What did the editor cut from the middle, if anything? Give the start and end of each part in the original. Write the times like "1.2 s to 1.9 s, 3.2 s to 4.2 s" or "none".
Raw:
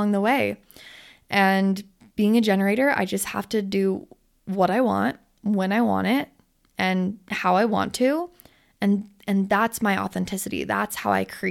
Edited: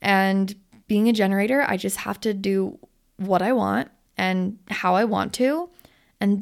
5.3 s to 6.7 s

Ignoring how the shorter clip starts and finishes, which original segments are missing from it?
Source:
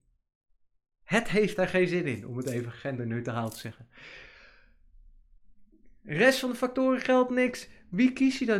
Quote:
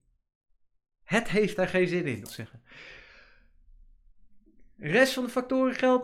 2.3 s to 3.5 s

